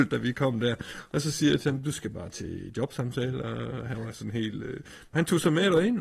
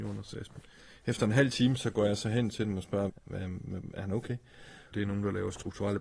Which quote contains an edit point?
second; 2 cuts; at 3.1 s, 4.9 s

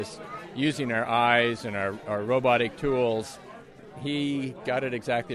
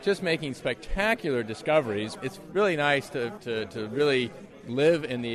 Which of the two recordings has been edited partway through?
second; 2 cuts; at 2.2 s, 3.4 s

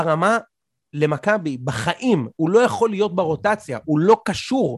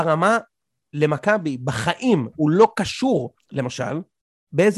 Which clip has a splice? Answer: second; 2 cuts; at 2.3 s, 3.4 s

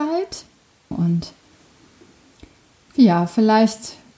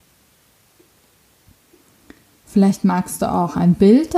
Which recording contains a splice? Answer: first; 1 cut; at 0.9 s

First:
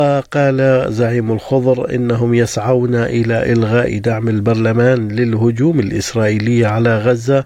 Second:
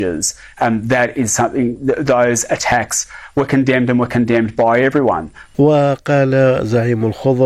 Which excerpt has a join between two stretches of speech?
second; 1 cut; at 5.5 s

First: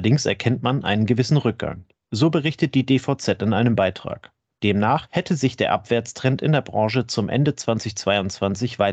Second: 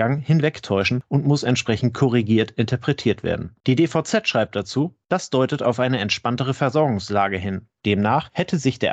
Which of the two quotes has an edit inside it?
second; 2 cuts; at 3.6 s, 7.8 s

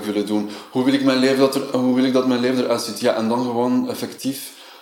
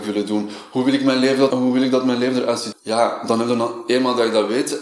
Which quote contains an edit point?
second; 2 cuts; at 1.5 s, 2.7 s

